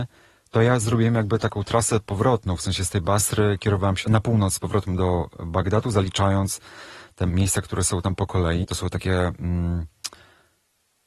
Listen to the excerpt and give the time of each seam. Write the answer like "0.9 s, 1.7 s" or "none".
4.0 s, 8.6 s

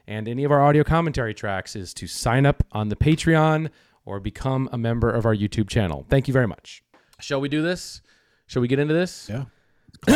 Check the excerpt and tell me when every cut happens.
7.1 s

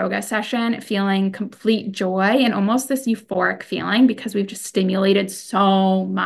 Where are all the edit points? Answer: none

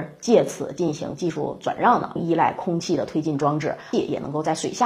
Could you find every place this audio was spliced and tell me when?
2.2 s, 3.9 s

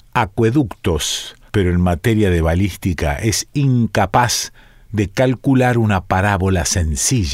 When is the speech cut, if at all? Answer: 1.5 s

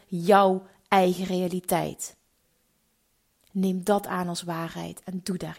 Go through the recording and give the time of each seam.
none

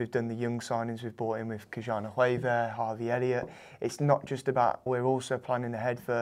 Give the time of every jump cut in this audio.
4.9 s

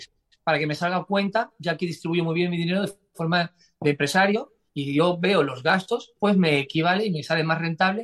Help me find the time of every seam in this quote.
6.2 s

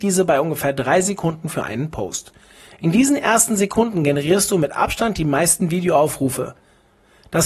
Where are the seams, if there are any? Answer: none

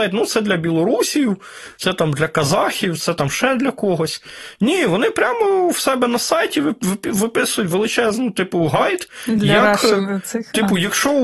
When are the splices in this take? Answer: none

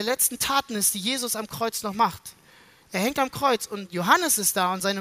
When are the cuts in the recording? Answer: none

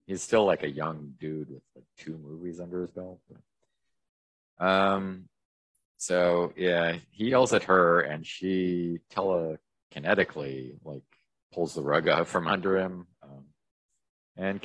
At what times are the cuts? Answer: 13.1 s

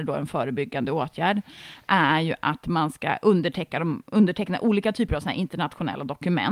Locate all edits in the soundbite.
none

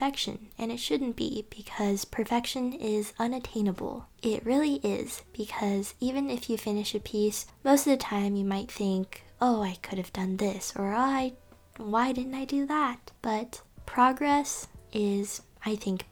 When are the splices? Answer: none

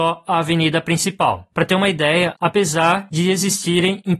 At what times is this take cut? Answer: 2.4 s

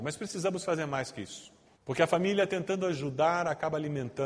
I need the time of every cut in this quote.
1.8 s

